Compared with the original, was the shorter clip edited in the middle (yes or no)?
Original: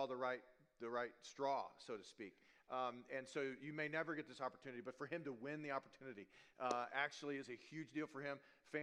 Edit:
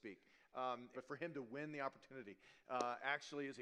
yes